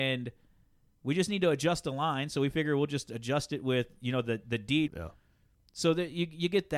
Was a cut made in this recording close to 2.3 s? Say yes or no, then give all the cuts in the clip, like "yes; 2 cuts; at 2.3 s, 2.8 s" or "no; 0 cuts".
no; 1 cut; at 4.9 s